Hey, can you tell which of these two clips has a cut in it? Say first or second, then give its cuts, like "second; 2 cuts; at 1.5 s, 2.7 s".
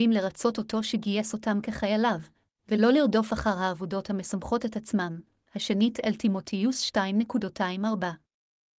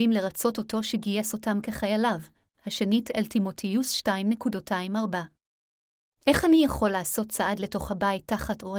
second; 2 cuts; at 2.5 s, 6.1 s